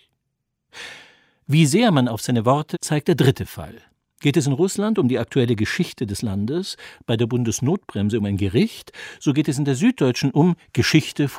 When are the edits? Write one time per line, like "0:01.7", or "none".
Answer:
0:02.7